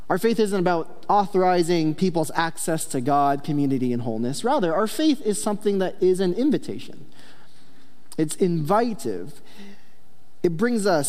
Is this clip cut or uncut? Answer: uncut